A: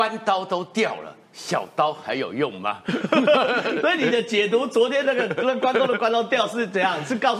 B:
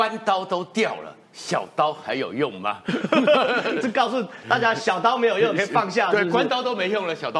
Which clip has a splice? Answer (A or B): B